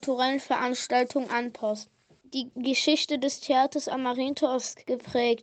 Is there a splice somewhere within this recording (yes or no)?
yes